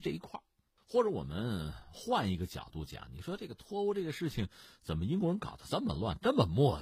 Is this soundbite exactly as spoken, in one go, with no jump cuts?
yes; 0 cuts

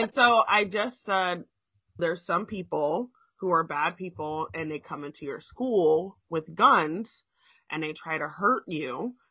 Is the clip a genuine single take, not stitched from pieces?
no; 1 cut; at 2.0 s

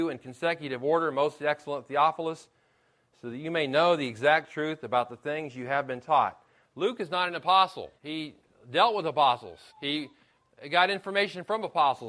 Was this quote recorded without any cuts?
no; 2 cuts; at 8.0 s, 9.7 s

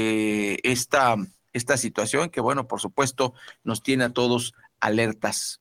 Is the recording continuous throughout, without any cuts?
yes; 0 cuts

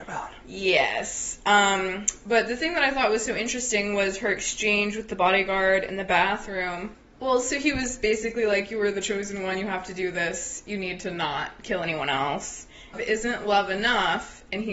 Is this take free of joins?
no; 1 cut; at 12.9 s

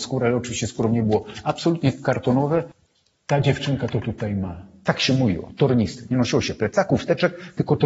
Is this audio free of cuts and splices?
no; 1 cut; at 4.8 s

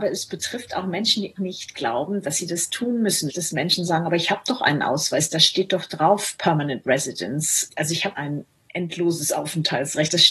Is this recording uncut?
no; 1 cut; at 1.4 s

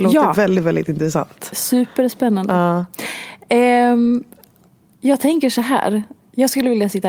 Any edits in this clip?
no; 0 cuts

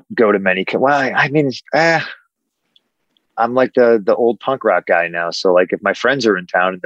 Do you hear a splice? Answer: no; 0 cuts

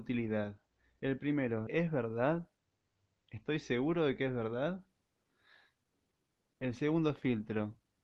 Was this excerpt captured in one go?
no; 1 cut; at 1.7 s

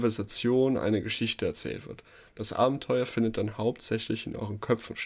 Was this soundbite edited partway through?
no; 0 cuts

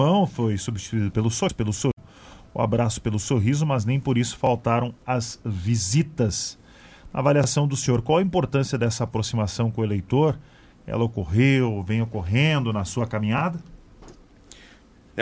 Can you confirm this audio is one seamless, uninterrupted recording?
yes; 0 cuts

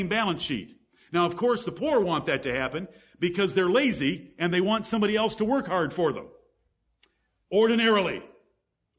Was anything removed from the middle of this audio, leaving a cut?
no; 0 cuts

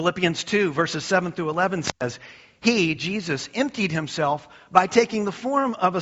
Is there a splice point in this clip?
no; 0 cuts

